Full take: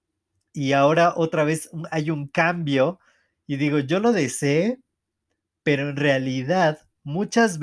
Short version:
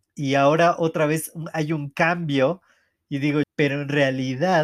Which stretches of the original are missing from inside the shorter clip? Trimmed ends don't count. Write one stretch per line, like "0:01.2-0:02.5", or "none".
0:03.8-0:05.5